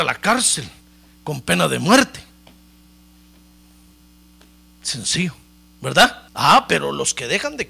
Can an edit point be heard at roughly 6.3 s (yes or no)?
yes